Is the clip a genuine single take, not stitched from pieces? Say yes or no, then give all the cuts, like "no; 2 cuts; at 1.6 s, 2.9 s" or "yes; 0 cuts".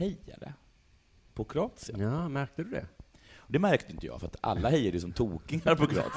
yes; 0 cuts